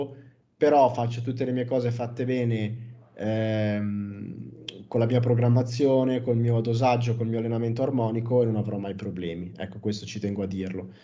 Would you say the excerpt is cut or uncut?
uncut